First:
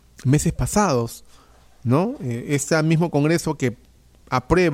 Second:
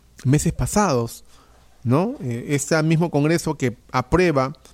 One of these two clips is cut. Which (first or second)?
second